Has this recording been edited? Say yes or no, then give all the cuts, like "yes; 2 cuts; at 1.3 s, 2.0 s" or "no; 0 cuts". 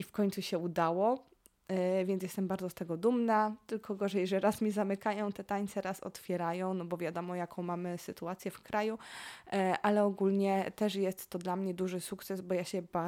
no; 0 cuts